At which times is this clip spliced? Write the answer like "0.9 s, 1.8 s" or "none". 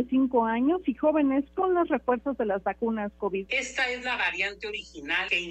3.5 s